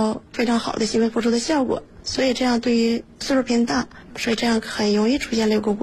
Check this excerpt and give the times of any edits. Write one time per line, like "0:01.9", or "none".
0:04.1